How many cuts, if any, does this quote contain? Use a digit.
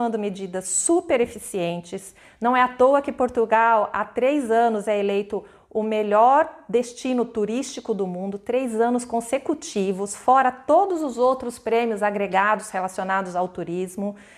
0